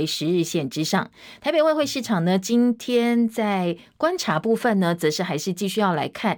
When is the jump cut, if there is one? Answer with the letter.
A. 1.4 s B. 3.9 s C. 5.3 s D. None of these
A